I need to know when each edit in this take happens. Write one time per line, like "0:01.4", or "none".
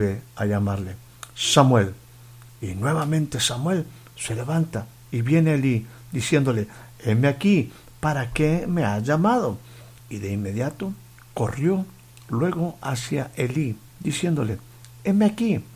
0:10.0
0:13.9